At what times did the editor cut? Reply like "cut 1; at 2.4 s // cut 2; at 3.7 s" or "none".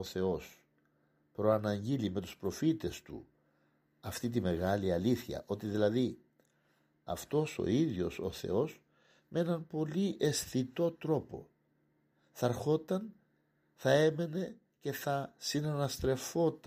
none